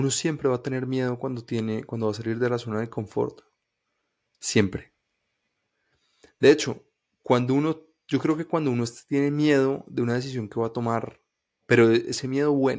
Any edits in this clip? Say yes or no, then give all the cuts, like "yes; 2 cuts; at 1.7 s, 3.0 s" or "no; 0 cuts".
no; 0 cuts